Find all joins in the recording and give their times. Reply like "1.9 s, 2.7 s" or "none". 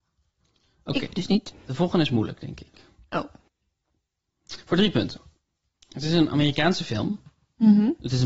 none